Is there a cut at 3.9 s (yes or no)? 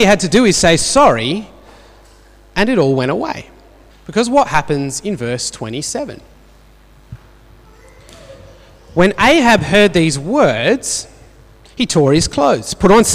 yes